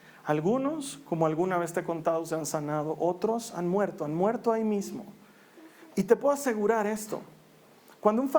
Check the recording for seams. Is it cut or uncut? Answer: cut